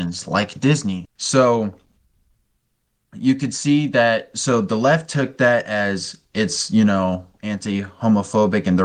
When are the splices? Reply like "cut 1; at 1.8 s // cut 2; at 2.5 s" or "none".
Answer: cut 1; at 1.1 s